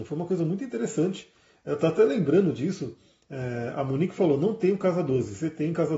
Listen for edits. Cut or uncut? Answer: uncut